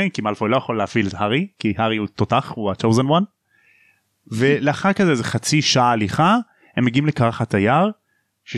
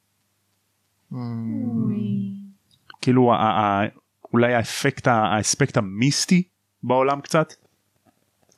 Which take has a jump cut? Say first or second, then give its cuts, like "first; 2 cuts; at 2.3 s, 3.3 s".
second; 2 cuts; at 1.0 s, 2.9 s